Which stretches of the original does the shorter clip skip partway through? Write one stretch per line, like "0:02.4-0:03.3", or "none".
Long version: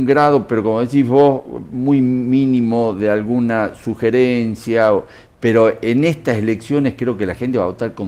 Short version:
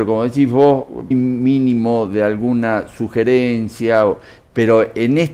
0:01.7-0:02.0